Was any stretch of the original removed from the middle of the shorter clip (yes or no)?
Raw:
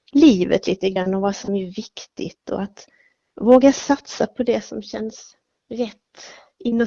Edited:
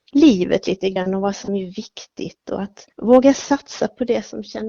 yes